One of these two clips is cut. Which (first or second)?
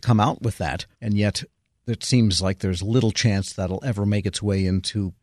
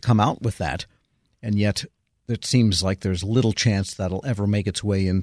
first